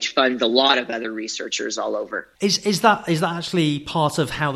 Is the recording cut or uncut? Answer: cut